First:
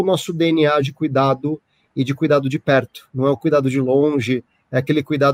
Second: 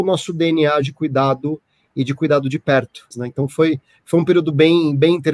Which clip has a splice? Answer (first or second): second